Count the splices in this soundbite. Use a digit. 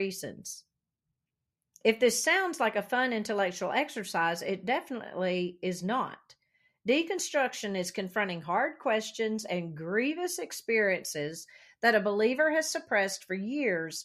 0